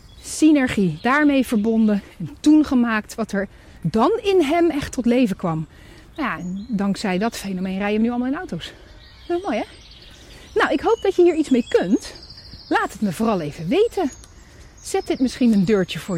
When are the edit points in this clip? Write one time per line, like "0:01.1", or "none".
0:06.4